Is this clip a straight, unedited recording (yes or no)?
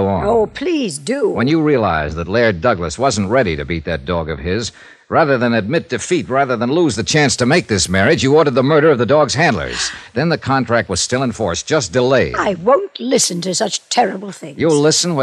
yes